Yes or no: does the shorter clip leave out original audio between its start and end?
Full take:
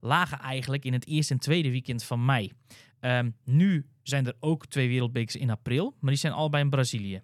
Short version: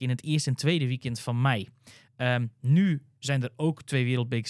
no